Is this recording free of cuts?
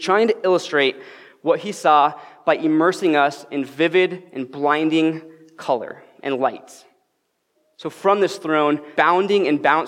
no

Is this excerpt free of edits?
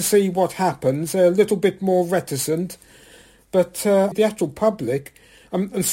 no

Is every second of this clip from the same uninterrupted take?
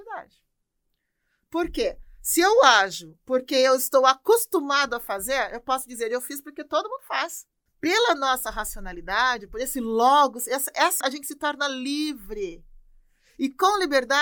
no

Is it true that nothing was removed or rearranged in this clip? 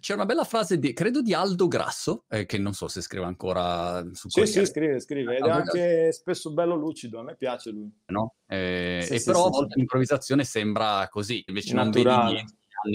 no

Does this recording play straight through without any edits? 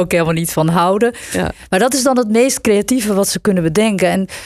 yes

